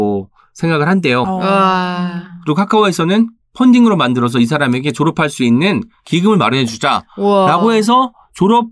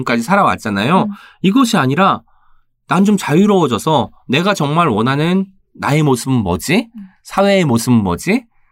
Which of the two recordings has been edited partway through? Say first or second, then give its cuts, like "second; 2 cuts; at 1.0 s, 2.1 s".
first; 1 cut; at 1.2 s